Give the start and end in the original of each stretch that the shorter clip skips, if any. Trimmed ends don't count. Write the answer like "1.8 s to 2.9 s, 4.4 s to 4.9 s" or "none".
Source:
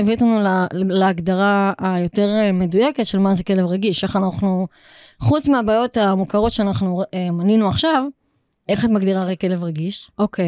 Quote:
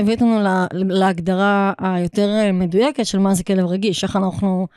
none